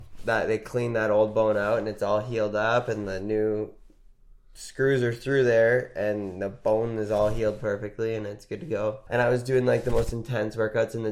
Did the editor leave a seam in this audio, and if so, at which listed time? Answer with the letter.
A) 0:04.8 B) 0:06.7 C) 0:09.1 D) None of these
C